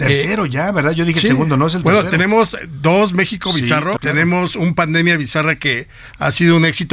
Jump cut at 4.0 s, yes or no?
yes